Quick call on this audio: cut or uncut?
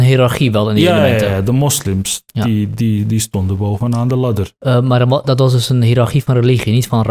uncut